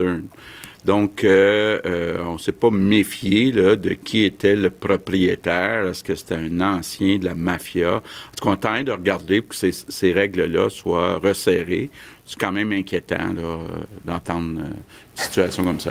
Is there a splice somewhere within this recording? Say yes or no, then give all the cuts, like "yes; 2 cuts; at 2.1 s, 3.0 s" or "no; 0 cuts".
no; 0 cuts